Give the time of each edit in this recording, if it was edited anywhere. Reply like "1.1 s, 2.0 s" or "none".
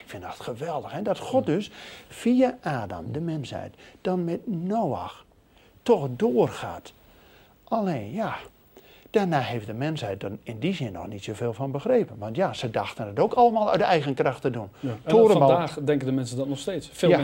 none